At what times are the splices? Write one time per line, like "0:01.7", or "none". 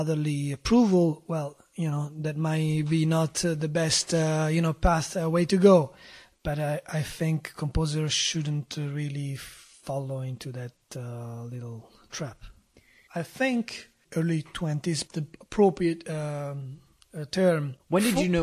0:13.1
0:15.1